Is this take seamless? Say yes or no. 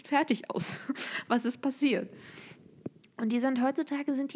yes